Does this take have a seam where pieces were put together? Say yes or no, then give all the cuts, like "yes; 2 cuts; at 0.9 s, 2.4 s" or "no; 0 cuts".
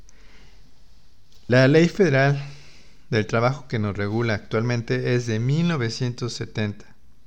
no; 0 cuts